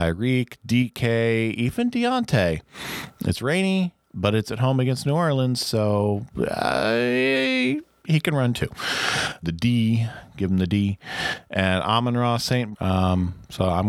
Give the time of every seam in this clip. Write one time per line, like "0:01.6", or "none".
0:09.4
0:12.7

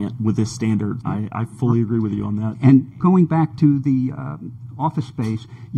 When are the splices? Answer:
0:01.0
0:03.0

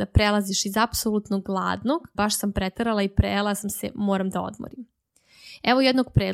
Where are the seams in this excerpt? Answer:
0:02.1

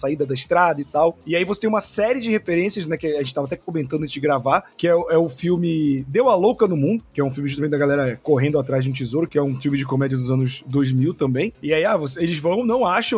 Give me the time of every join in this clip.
0:09.3
0:11.5

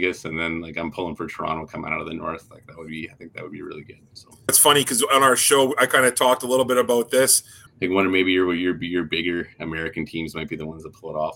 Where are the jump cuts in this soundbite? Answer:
0:04.5
0:07.7

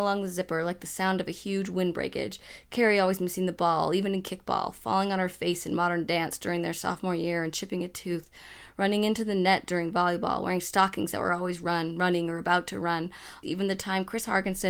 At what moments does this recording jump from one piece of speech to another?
0:13.4

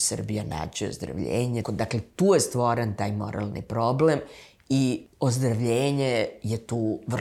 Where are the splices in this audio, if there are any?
0:01.6

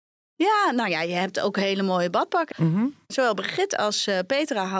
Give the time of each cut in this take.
0:02.5

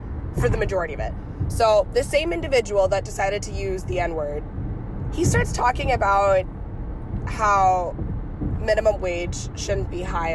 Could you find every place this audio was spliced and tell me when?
0:05.1

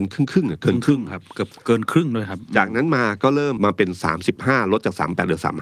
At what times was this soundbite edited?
0:03.6

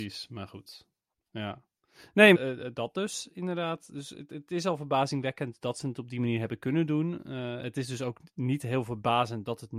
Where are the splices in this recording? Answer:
0:02.3

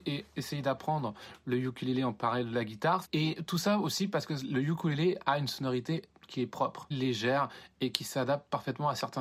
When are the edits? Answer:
0:03.0
0:06.9

